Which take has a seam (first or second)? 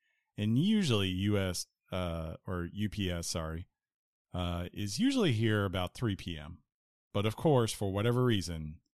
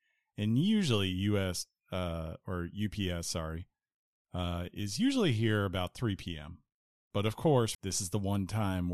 second